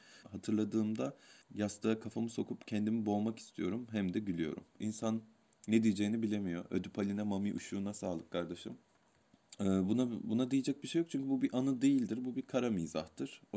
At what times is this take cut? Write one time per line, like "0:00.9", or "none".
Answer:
0:04.8